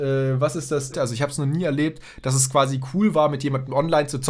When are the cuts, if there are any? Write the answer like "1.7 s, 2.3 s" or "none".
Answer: 0.9 s